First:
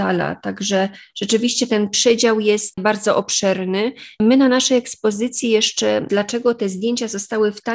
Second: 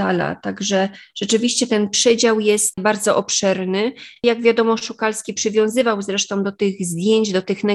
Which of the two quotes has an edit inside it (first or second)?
first